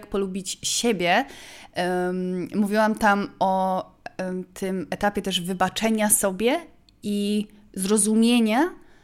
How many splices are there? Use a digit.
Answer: 0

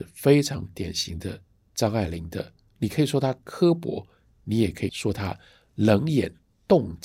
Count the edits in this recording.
0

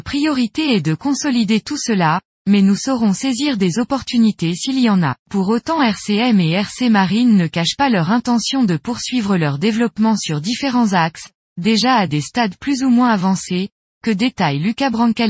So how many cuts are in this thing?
1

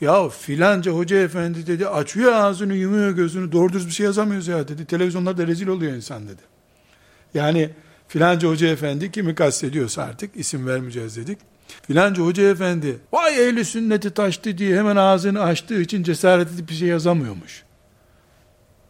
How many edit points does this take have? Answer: 2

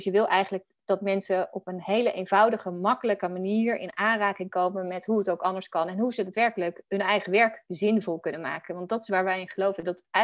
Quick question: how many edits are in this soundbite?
0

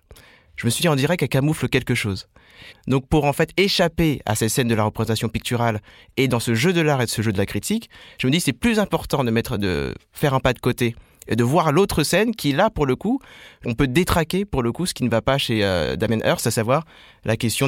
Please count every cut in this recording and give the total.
1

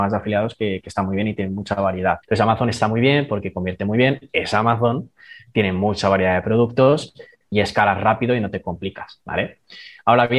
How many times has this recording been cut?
2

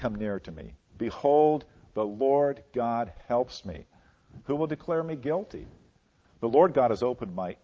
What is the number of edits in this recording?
1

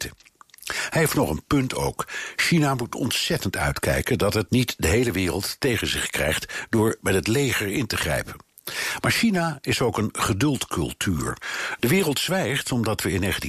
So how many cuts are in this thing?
2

